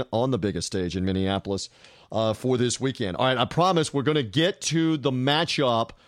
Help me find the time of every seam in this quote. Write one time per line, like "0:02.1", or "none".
none